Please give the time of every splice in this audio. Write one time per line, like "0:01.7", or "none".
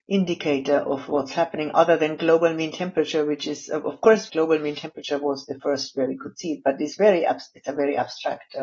0:04.3